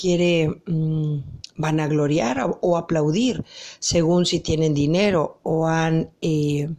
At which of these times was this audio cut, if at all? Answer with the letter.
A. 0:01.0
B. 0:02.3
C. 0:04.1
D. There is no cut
D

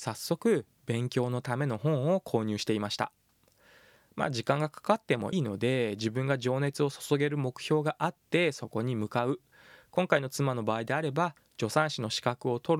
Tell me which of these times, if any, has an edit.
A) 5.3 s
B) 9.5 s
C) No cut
A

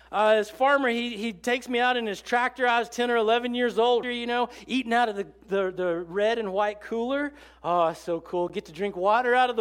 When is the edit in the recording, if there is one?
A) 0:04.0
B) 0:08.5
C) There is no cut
A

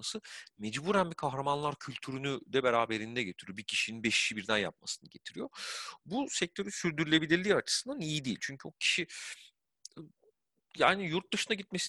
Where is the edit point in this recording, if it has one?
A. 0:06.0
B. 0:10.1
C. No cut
C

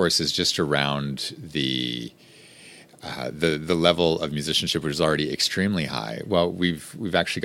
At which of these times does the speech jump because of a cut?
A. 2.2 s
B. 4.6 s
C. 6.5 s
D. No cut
D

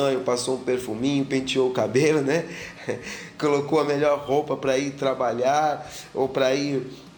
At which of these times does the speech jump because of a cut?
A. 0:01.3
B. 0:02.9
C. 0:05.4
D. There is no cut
D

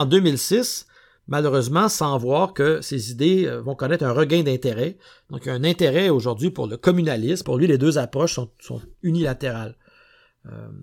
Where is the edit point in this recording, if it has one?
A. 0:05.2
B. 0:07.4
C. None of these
B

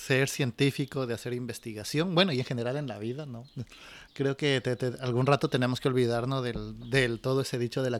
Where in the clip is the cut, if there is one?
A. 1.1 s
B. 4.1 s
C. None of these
B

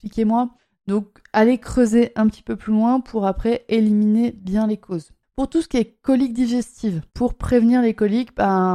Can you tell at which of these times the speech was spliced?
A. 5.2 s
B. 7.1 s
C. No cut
B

